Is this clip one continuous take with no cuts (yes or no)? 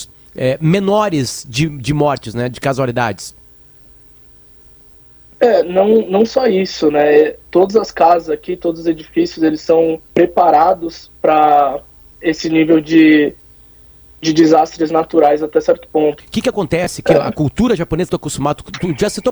no